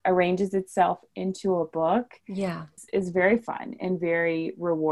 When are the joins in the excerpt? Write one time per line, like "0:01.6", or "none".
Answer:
none